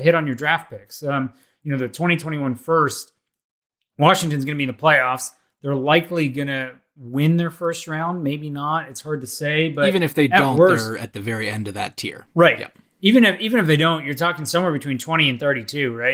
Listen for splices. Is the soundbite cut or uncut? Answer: uncut